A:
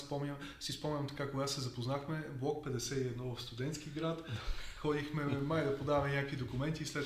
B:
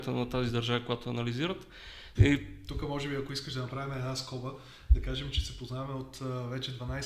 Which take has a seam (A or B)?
B